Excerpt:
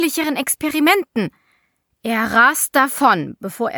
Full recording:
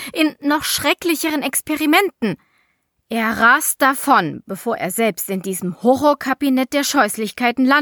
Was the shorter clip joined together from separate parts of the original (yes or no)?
no